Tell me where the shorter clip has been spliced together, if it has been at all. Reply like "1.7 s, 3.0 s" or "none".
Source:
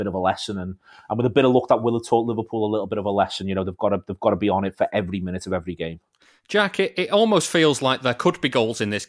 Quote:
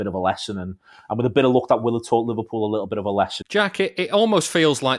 3.4 s